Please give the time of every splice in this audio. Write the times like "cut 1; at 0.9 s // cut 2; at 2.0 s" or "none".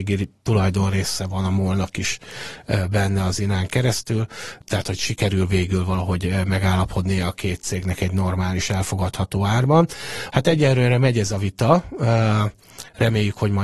cut 1; at 10.3 s